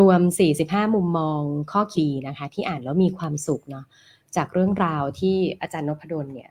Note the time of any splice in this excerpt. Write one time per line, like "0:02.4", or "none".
0:01.9